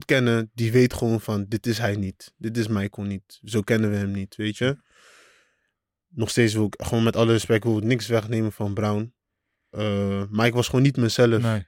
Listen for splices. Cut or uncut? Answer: uncut